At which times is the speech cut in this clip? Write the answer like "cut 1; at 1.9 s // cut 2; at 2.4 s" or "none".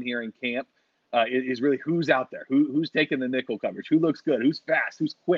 none